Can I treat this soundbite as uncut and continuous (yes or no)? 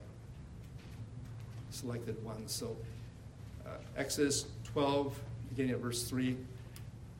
yes